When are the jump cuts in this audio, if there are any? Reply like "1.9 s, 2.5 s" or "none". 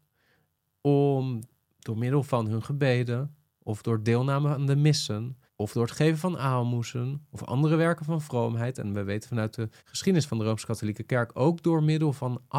5.5 s, 9.8 s